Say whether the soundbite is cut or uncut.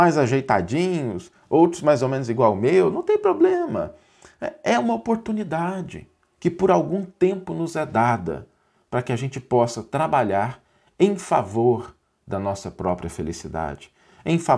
uncut